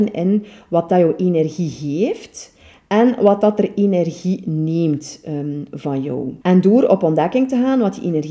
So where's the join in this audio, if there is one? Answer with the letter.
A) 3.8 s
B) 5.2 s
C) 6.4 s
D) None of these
C